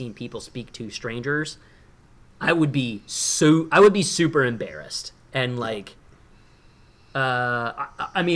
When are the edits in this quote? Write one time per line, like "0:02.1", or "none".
none